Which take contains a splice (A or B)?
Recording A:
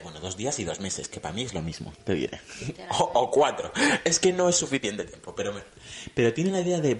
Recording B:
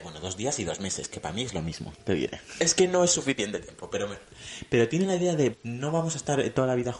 B